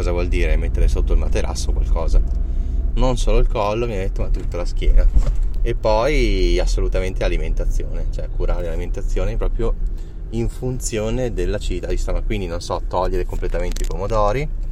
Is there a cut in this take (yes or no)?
yes